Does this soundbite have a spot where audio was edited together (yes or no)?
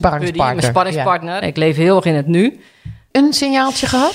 yes